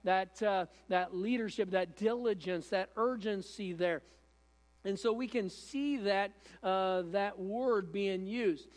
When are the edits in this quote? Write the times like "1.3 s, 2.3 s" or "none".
none